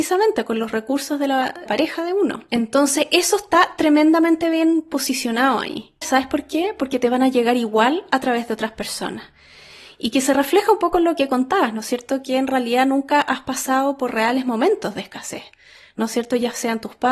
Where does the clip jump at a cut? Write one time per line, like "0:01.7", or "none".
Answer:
0:01.7
0:06.0